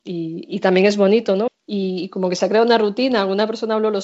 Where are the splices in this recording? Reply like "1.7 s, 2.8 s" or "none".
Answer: 1.5 s